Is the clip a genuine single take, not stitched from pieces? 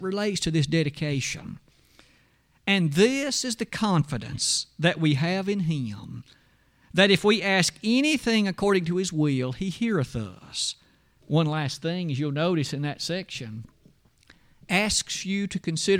no; 1 cut; at 11.2 s

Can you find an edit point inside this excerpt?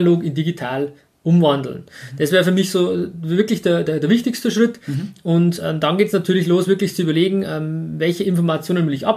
no; 0 cuts

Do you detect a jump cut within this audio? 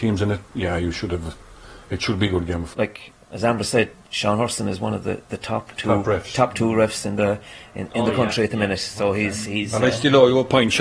yes; 1 cut; at 2.7 s

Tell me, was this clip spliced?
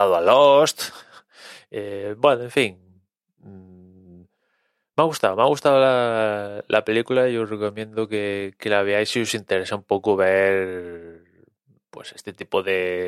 no; 0 cuts

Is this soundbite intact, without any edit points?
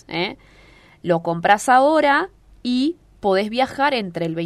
yes; 0 cuts

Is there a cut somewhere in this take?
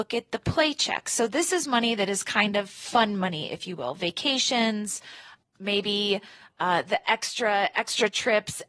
no; 0 cuts

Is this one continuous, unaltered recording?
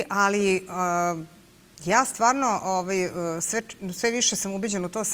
yes; 0 cuts

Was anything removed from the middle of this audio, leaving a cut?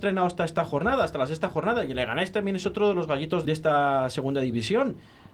yes; 1 cut; at 3.4 s

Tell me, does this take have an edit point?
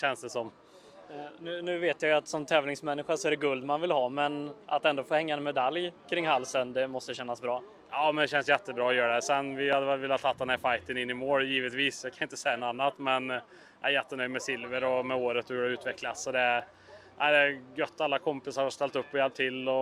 no; 0 cuts

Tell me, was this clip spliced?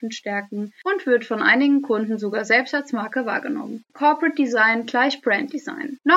yes; 1 cut; at 3.9 s

